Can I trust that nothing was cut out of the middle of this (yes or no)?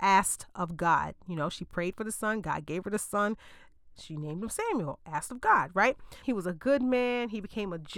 no